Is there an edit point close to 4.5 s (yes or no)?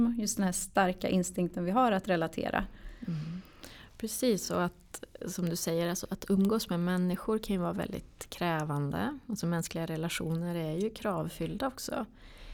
no